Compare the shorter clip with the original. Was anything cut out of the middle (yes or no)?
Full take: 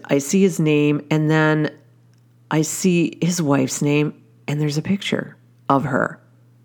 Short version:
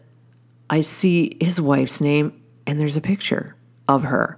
no